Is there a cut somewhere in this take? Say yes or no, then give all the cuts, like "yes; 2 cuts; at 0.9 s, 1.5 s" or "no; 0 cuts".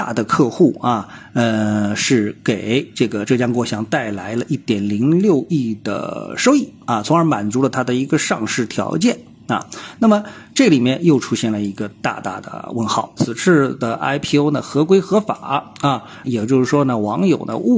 yes; 2 cuts; at 13.2 s, 16.2 s